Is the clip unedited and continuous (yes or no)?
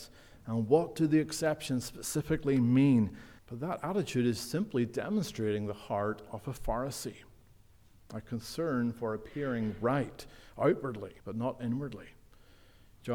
no